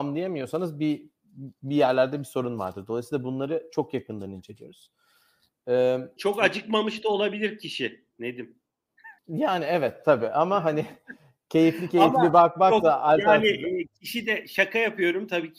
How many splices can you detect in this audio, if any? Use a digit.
2